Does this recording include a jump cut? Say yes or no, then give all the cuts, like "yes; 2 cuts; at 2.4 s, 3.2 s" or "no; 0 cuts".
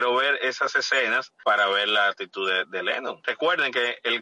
no; 0 cuts